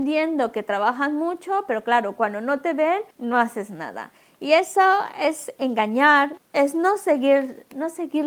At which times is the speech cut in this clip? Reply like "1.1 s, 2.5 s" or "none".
3.1 s, 6.4 s